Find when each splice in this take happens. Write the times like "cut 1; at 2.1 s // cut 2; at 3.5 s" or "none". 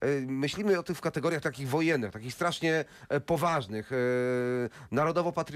cut 1; at 1.4 s